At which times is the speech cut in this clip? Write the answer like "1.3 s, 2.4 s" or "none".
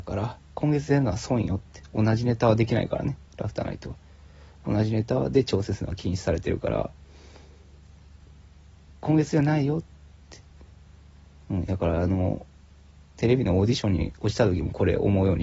none